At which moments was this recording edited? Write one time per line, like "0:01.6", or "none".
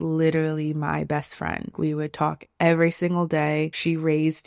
none